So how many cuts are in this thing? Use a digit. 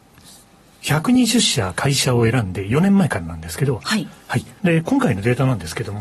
1